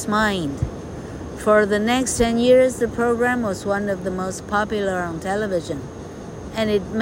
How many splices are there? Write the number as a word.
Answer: zero